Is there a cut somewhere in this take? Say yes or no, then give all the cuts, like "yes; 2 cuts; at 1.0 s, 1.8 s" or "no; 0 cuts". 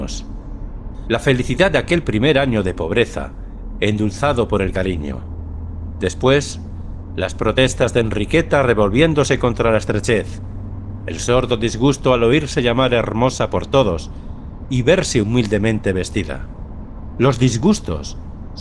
no; 0 cuts